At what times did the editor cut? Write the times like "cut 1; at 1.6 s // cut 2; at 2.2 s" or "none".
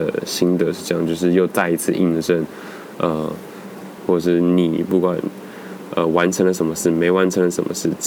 cut 1; at 4.0 s

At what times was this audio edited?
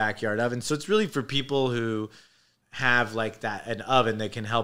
cut 1; at 2.6 s

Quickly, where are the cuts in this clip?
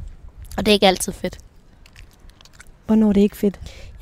none

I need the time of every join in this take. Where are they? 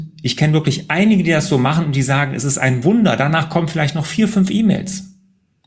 none

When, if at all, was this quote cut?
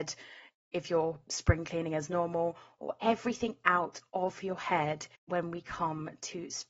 cut 1; at 5.2 s

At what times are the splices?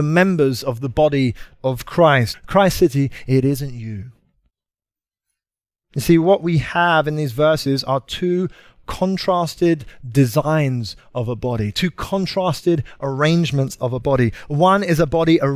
cut 1; at 2.3 s // cut 2; at 5.8 s

